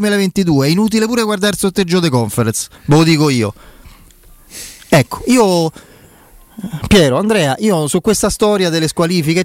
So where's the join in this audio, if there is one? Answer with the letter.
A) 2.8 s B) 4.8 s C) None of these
A